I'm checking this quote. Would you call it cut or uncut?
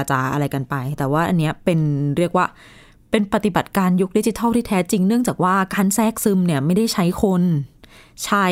uncut